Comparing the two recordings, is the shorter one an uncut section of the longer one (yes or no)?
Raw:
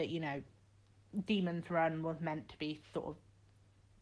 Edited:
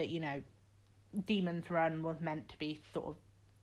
yes